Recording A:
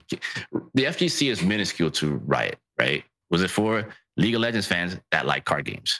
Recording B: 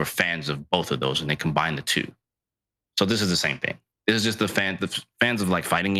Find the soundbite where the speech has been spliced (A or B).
A